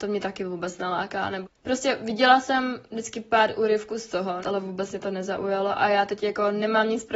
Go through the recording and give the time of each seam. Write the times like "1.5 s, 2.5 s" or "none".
1.4 s, 4.4 s